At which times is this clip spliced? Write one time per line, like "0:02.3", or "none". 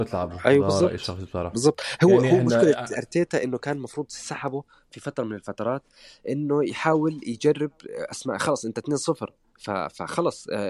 none